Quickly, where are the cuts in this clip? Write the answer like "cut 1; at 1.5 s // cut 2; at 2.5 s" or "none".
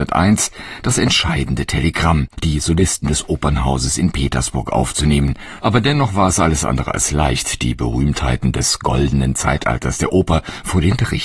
cut 1; at 2.3 s // cut 2; at 5.6 s